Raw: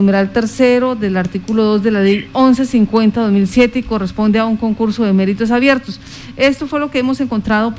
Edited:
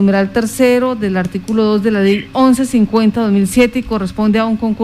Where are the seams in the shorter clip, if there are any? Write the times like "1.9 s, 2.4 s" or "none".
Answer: none